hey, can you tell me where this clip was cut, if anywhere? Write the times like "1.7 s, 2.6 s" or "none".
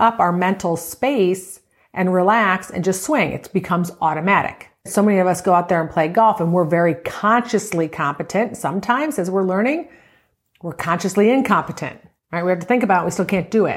4.8 s